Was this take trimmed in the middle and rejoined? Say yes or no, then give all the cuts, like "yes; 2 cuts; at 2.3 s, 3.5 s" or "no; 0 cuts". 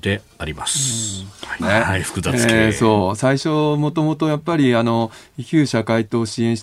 yes; 1 cut; at 1.6 s